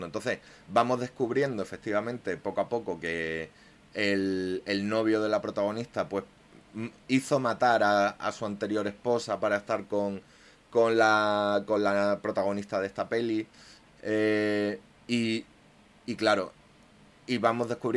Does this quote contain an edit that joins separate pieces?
no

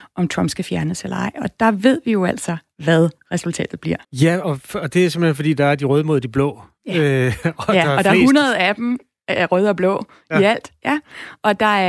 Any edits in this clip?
yes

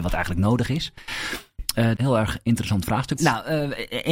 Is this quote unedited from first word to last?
no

